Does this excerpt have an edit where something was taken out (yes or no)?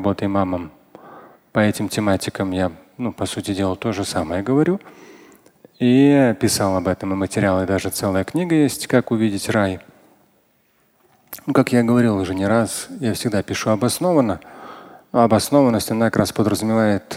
no